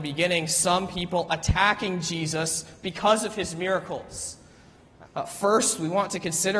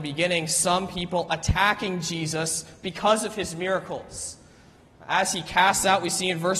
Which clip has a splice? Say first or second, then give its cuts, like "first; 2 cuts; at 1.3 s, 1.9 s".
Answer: first; 1 cut; at 5.0 s